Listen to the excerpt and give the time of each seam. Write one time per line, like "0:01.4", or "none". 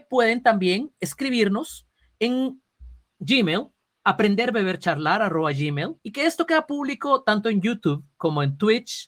0:06.0